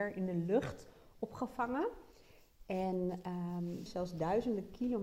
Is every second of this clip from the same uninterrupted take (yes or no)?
no